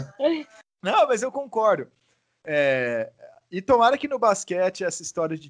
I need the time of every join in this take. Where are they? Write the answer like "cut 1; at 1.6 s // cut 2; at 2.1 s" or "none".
none